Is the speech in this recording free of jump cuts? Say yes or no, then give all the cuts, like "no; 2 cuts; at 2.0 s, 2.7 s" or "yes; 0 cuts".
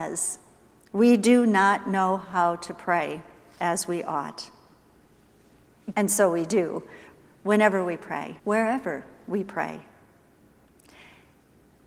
no; 2 cuts; at 5.9 s, 8.4 s